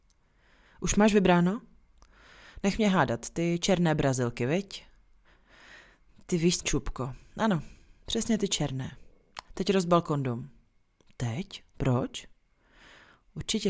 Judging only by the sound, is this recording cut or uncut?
cut